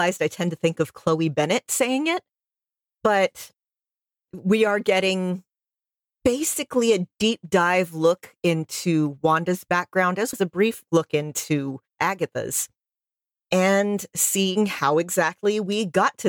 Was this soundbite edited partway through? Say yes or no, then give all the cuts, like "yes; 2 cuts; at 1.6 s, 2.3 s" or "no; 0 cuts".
yes; 2 cuts; at 10.3 s, 11.9 s